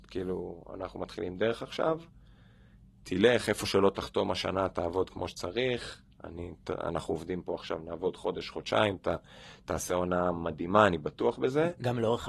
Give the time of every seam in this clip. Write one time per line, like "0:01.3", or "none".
none